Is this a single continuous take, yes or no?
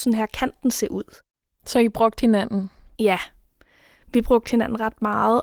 yes